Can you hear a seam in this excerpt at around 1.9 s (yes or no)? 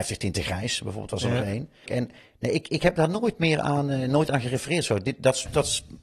yes